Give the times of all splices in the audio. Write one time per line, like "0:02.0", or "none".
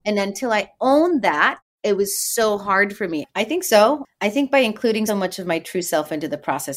0:03.3
0:05.1